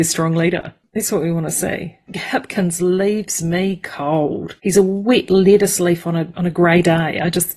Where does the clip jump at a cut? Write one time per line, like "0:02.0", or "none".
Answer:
0:04.6